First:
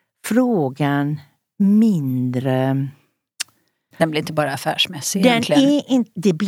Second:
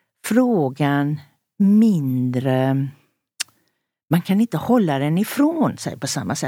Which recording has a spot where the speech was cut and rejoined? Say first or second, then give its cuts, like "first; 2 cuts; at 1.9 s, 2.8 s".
first; 1 cut; at 3.9 s